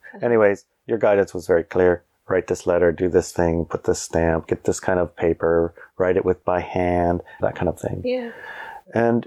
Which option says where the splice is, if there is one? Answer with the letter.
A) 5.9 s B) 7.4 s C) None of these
B